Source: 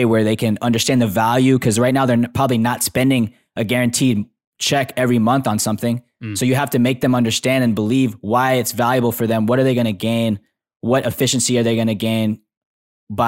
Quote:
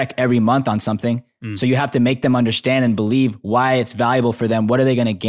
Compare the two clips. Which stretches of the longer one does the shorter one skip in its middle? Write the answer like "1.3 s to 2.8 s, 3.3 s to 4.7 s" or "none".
none